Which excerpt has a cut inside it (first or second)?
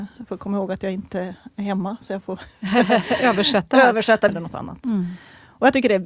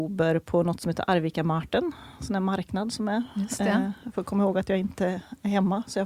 first